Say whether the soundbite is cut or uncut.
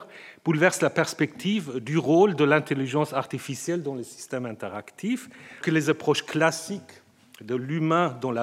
cut